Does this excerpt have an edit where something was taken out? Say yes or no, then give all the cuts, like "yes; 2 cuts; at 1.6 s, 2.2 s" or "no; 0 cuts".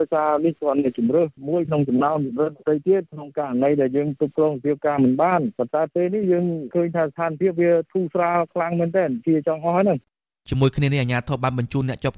no; 0 cuts